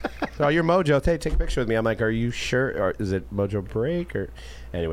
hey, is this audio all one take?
yes; 0 cuts

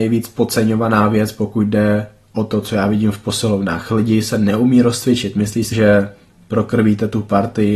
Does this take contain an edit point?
yes; 1 cut; at 5.7 s

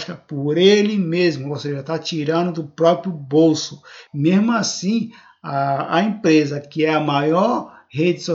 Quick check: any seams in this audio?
yes; 1 cut; at 4.1 s

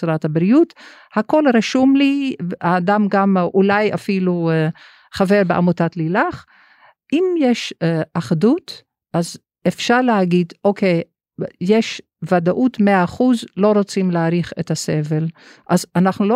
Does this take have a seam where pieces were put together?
no; 0 cuts

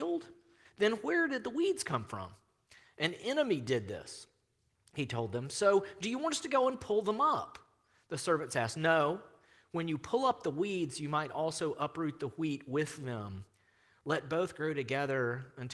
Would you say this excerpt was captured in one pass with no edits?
yes; 0 cuts

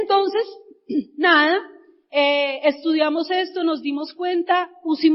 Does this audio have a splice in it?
no; 0 cuts

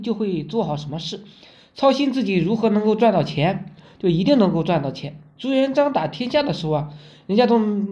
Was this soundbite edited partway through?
no; 0 cuts

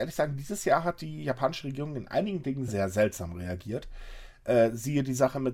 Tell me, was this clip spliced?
yes; 1 cut; at 2.7 s

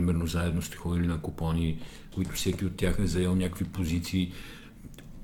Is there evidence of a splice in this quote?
yes; 1 cut; at 2.1 s

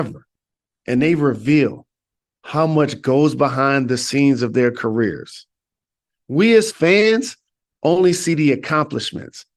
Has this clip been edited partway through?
no; 0 cuts

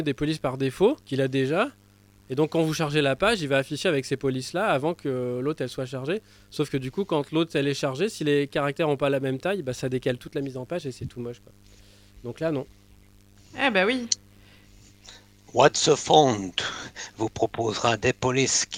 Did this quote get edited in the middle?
yes; 1 cut; at 1.0 s

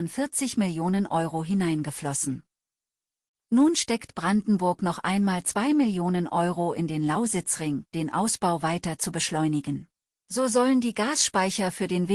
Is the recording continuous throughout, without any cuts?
no; 2 cuts; at 7.9 s, 10.2 s

